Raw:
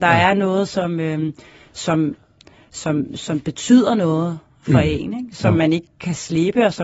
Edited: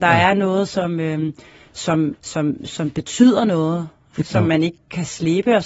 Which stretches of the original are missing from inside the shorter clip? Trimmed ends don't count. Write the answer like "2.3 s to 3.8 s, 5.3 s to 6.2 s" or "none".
2.2 s to 2.7 s, 4.7 s to 5.3 s